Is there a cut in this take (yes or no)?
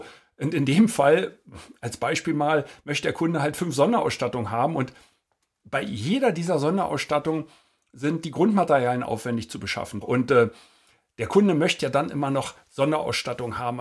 yes